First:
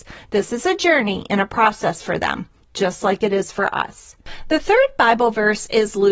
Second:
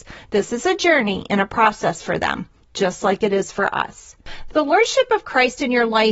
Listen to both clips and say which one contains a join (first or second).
second